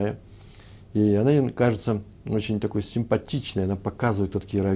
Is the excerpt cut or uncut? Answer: uncut